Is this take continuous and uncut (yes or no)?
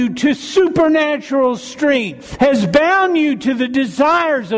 no